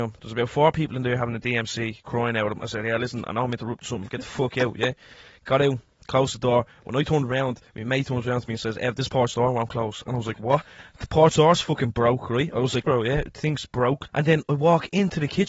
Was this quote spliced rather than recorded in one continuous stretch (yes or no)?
yes